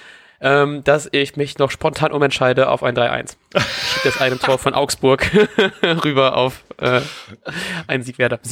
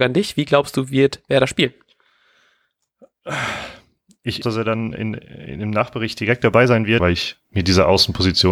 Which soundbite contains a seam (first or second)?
second